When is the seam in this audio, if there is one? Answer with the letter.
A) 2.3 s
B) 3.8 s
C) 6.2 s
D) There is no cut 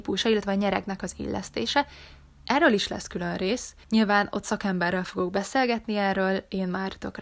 B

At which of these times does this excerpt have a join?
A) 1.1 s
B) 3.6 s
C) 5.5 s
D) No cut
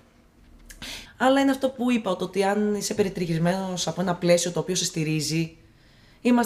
A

